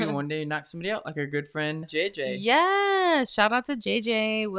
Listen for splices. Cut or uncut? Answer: cut